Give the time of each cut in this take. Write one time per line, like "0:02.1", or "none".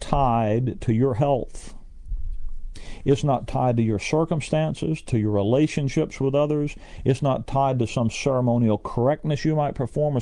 0:03.0